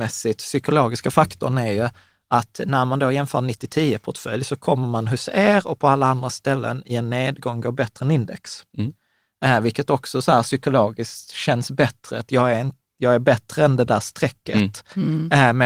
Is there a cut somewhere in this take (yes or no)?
no